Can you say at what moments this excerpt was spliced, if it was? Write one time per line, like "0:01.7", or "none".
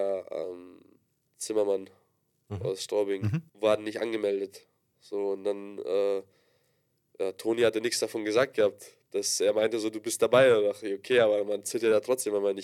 0:03.5